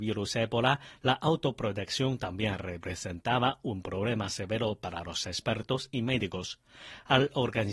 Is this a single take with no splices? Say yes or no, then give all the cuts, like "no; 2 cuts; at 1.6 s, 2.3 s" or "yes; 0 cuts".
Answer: yes; 0 cuts